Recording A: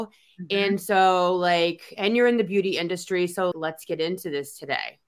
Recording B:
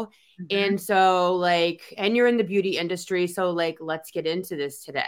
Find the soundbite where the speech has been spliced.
A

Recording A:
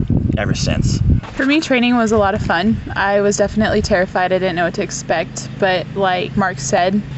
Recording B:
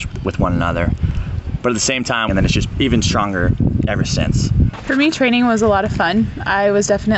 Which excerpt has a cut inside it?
B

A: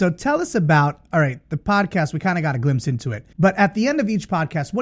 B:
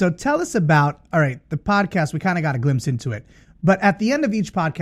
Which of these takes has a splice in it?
A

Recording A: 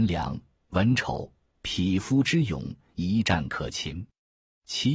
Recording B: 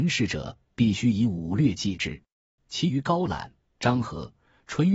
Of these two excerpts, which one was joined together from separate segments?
B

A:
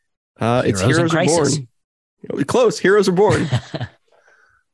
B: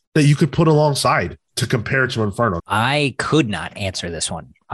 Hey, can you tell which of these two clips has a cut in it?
B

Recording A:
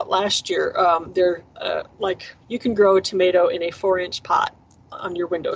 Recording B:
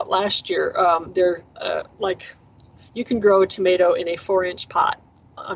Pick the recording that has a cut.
A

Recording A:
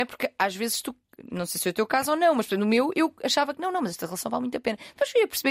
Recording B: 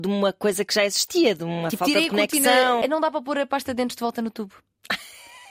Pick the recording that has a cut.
B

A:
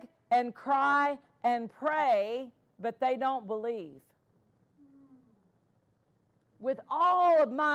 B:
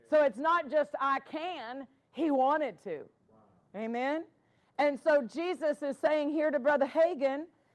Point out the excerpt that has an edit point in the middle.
A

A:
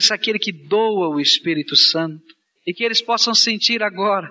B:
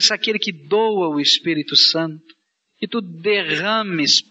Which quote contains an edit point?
A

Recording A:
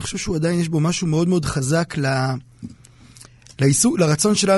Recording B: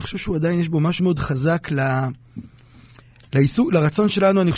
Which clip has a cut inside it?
B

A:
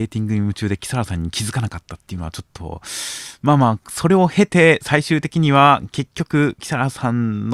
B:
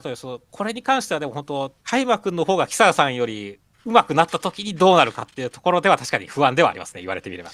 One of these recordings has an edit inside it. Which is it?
B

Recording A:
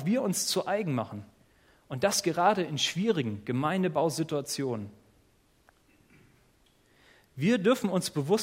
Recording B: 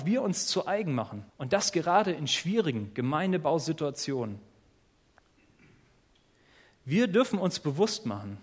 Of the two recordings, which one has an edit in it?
B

